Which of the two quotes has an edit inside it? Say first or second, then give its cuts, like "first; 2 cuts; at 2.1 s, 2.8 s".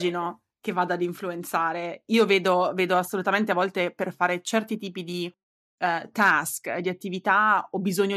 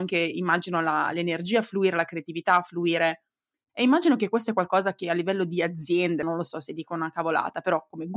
second; 2 cuts; at 3.7 s, 6.2 s